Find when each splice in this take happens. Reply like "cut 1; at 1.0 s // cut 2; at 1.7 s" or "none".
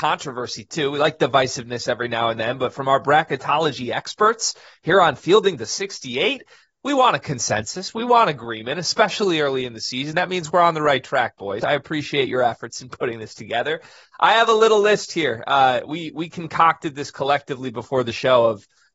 cut 1; at 11.6 s